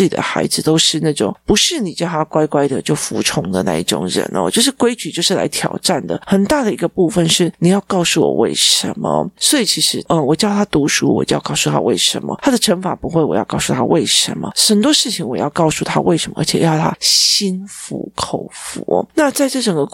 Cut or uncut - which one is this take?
uncut